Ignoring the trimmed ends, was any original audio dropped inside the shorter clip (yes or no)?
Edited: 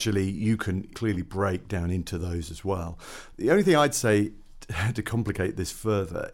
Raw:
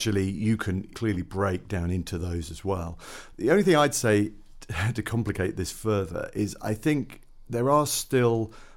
no